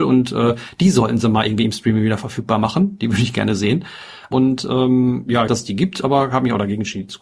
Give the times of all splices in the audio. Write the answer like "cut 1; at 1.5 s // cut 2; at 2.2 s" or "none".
cut 1; at 4.3 s // cut 2; at 5.5 s